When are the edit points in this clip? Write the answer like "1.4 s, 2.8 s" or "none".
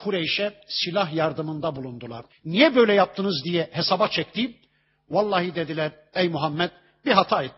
2.3 s